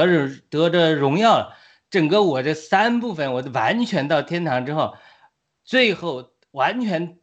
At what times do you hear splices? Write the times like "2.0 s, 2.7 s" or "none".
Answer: none